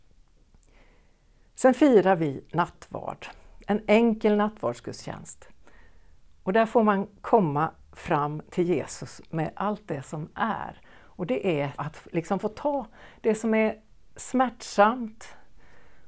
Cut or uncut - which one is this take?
cut